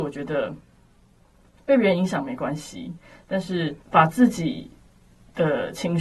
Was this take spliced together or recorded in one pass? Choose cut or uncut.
cut